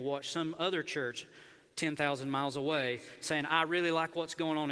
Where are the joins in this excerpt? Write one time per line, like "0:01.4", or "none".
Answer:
none